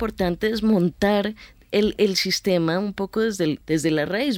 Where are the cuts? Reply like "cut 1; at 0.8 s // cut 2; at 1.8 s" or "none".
none